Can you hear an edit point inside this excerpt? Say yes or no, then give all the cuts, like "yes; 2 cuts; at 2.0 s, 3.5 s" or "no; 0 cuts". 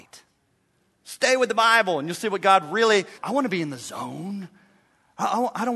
yes; 2 cuts; at 1.0 s, 3.2 s